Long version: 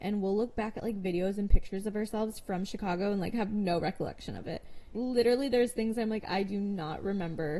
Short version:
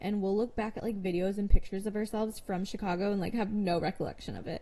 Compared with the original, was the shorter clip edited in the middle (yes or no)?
no